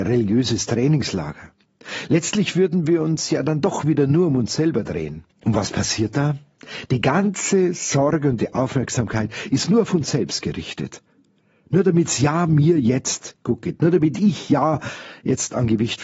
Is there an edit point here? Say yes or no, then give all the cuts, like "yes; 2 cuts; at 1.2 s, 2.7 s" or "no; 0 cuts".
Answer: yes; 1 cut; at 5.3 s